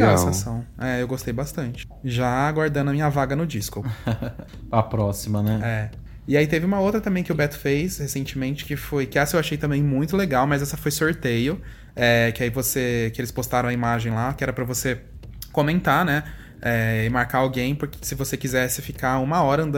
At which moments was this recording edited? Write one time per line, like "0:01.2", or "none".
none